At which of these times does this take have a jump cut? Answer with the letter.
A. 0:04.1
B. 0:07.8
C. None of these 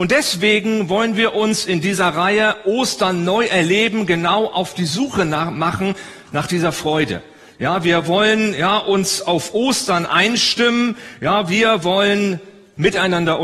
C